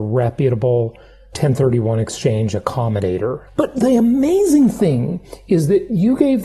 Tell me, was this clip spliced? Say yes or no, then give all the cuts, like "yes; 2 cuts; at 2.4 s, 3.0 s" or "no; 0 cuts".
yes; 1 cut; at 3.5 s